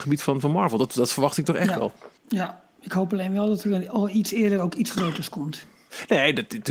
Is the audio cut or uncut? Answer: cut